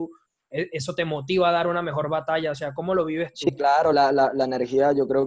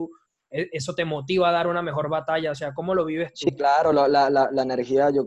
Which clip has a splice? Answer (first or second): first